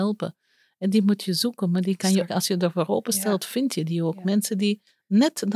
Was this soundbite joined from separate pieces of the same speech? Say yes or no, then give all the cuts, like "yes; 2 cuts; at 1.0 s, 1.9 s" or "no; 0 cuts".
yes; 1 cut; at 2.3 s